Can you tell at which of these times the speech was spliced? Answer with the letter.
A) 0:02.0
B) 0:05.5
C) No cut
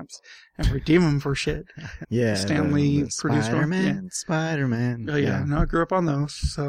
A